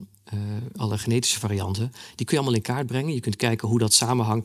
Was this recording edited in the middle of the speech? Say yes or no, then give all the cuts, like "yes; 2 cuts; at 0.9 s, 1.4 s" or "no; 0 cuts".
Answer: no; 0 cuts